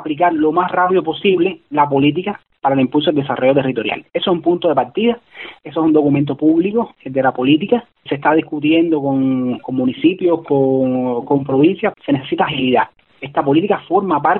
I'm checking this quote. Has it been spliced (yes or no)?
yes